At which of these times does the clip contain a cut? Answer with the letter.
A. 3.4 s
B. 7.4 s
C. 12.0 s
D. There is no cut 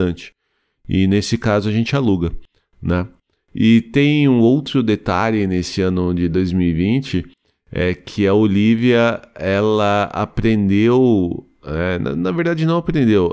D